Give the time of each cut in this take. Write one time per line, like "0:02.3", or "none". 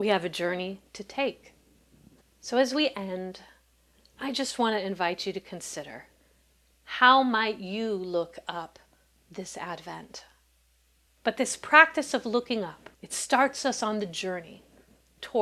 0:02.2
0:11.1
0:12.9